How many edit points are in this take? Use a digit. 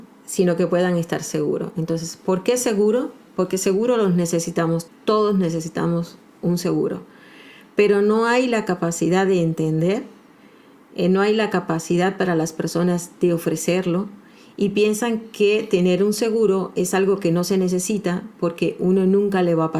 1